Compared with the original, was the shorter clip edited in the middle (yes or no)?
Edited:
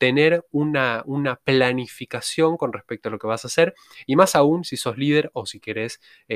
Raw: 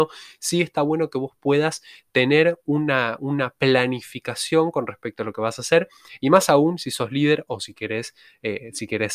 no